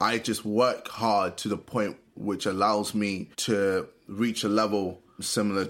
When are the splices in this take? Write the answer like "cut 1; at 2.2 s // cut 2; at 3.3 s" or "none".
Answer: cut 1; at 3.3 s